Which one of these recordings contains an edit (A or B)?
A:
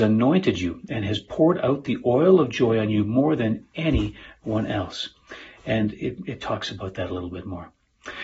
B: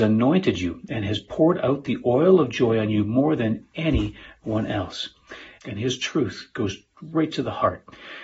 B